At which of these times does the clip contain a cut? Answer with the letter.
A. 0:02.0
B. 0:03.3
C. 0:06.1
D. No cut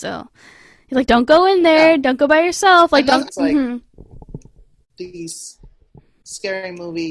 B